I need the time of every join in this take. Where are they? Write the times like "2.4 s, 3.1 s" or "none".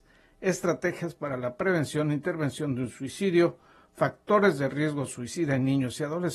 none